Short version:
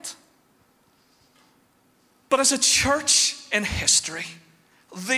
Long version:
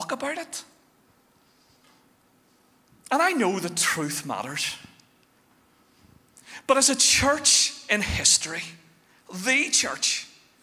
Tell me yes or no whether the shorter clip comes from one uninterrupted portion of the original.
no